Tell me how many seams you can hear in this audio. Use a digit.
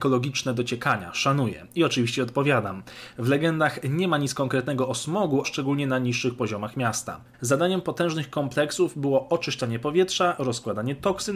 2